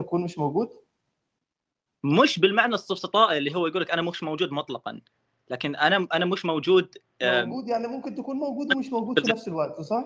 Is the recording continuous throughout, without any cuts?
yes; 0 cuts

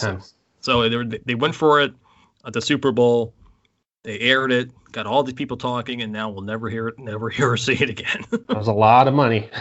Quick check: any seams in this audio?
no; 0 cuts

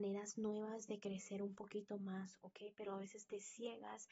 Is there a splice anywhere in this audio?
no; 0 cuts

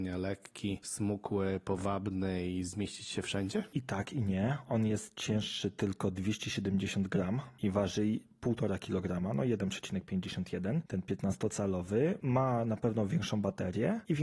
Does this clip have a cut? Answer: no; 0 cuts

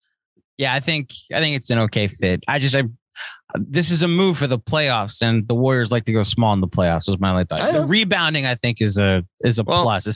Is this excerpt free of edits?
yes; 0 cuts

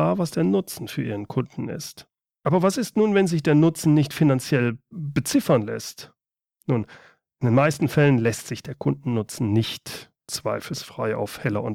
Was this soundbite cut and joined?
yes; 1 cut; at 2.3 s

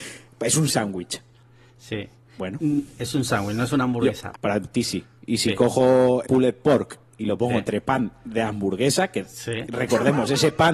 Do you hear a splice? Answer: yes; 2 cuts; at 4.3 s, 6.2 s

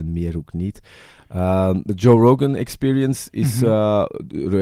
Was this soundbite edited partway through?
no; 0 cuts

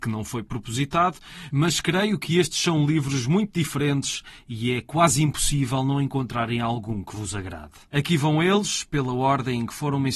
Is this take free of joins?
yes; 0 cuts

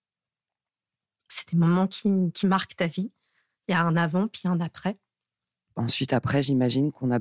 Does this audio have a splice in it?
no; 0 cuts

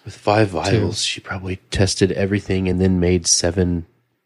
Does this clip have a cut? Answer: no; 0 cuts

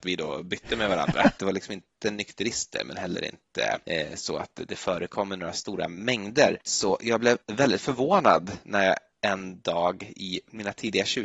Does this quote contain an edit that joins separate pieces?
yes; 1 cut; at 1.4 s

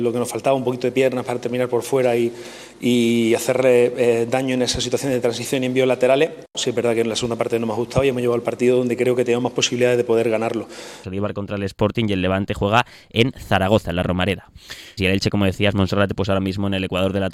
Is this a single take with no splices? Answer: no; 3 cuts; at 6.5 s, 11.0 s, 15.0 s

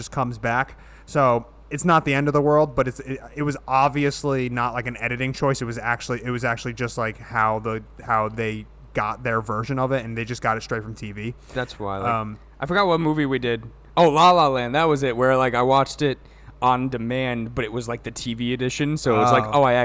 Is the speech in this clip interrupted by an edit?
no; 0 cuts

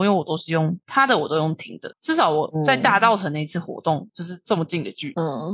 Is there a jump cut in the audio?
yes; 2 cuts; at 1.9 s, 4.1 s

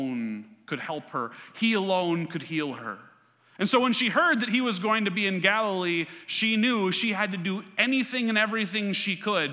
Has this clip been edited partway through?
no; 0 cuts

